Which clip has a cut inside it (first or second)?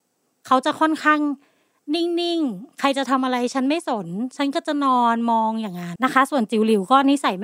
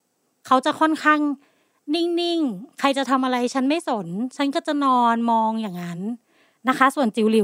first